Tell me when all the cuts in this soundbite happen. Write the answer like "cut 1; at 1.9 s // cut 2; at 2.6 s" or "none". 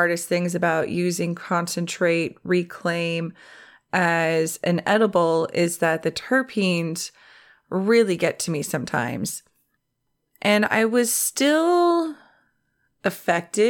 none